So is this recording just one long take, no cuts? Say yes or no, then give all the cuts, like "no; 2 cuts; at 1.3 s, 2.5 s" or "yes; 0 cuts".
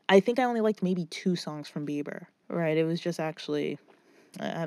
no; 1 cut; at 2.4 s